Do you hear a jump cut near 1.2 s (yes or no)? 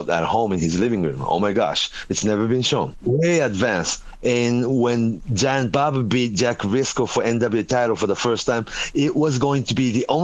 no